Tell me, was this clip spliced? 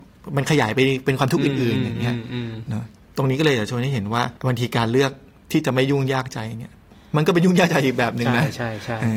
yes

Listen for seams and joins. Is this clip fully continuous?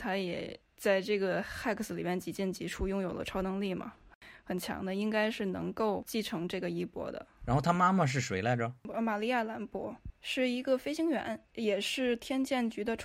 yes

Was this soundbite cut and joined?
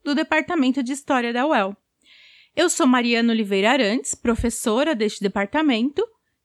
no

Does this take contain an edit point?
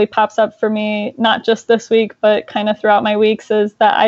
no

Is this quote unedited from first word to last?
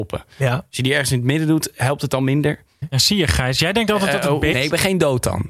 no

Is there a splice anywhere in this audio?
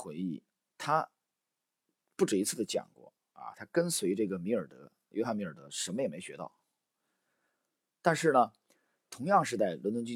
no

